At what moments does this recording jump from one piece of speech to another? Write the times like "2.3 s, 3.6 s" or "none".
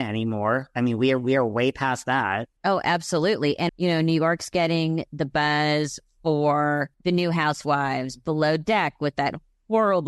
2.6 s, 3.7 s, 6.9 s